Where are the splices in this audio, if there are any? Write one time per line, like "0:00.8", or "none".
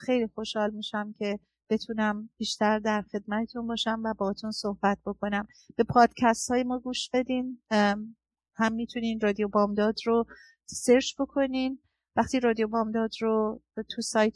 none

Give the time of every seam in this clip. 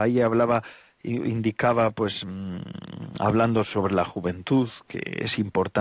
none

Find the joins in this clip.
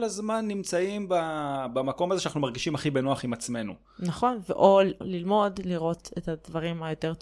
0:05.0

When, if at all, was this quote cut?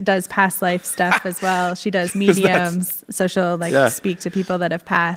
none

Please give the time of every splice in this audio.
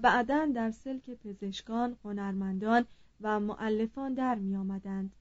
0:02.0

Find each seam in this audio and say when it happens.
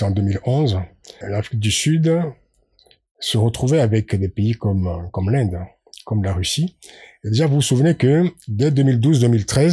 0:01.2

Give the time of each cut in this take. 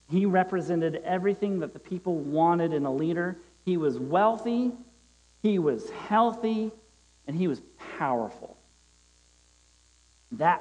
none

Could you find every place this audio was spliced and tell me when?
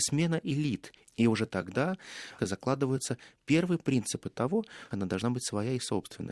0:01.0
0:02.4
0:04.9

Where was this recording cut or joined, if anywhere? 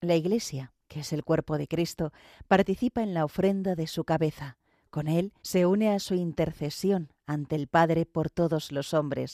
0:05.4

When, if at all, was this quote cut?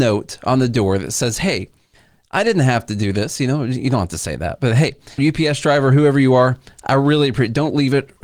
0:05.2

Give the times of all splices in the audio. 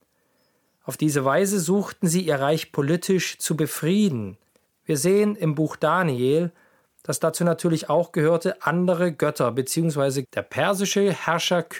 0:04.7
0:10.2

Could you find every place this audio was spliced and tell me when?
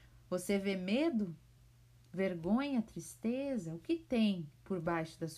none

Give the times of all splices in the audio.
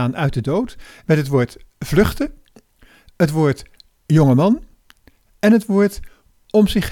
0:01.0

